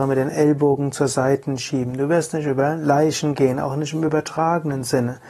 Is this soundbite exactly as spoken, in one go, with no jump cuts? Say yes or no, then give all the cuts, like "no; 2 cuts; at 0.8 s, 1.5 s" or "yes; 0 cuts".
yes; 0 cuts